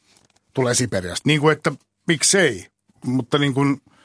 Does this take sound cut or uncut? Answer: cut